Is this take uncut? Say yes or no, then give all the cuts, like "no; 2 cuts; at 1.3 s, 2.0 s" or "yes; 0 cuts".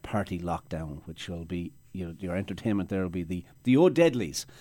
yes; 0 cuts